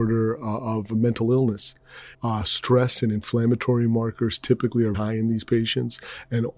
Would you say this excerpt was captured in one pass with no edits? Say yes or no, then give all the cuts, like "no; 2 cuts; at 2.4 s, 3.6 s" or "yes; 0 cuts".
no; 2 cuts; at 2.1 s, 4.9 s